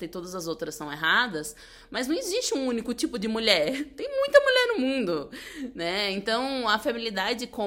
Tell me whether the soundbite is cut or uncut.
uncut